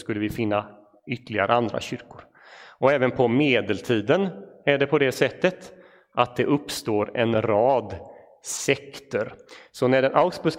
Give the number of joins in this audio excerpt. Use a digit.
0